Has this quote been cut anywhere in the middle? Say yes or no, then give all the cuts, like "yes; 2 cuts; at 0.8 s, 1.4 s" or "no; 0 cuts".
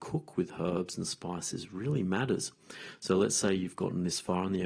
no; 0 cuts